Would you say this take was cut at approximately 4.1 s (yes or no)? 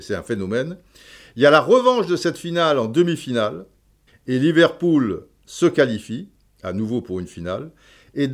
yes